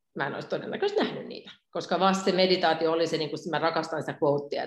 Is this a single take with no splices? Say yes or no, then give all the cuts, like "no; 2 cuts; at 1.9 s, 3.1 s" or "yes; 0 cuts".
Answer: yes; 0 cuts